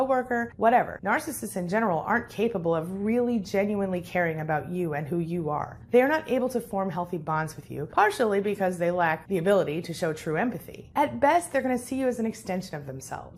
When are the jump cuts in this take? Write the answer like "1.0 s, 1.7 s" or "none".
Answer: 10.9 s